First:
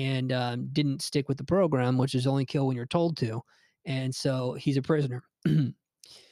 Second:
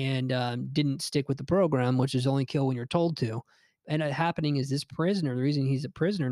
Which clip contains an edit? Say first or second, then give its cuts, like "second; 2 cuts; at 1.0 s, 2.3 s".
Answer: second; 1 cut; at 3.8 s